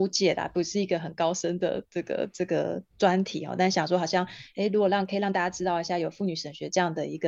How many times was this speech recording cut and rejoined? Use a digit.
1